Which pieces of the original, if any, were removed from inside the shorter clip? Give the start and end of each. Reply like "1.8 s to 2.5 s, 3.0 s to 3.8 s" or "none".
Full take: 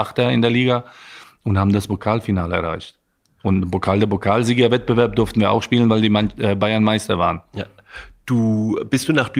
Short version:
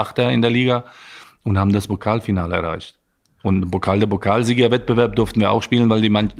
none